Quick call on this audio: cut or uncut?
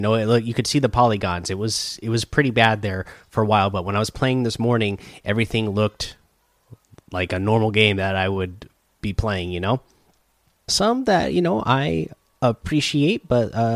cut